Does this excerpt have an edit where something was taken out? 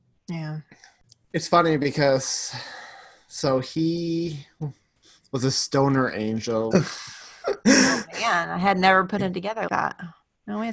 yes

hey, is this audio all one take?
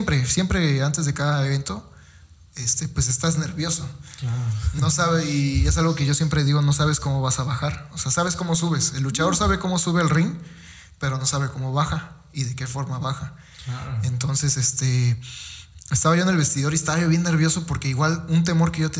yes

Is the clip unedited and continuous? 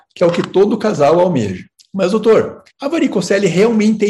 yes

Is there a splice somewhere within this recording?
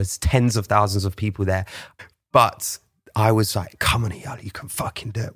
yes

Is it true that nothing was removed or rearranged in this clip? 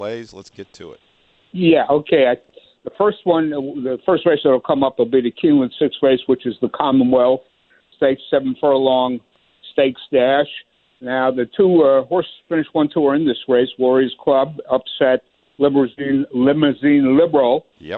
yes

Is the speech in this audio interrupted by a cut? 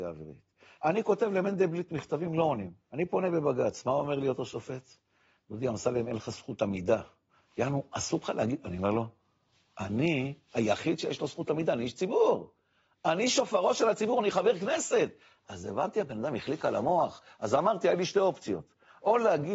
no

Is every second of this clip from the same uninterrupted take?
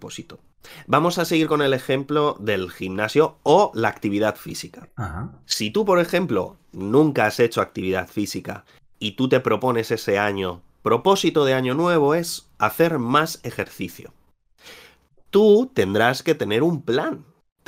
yes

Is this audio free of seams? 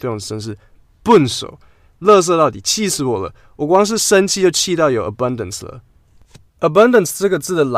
yes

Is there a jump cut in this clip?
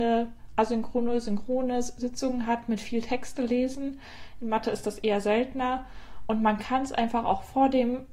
no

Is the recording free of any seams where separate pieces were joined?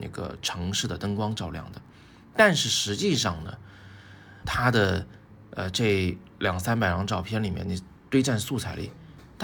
no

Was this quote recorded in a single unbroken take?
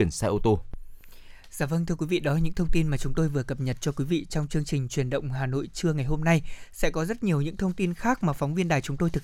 yes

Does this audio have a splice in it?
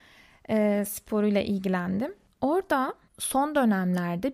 no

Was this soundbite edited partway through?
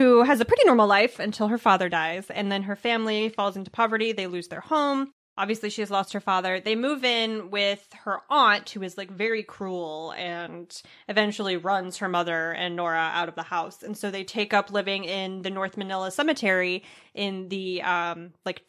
no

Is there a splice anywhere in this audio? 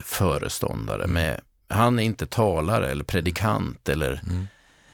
no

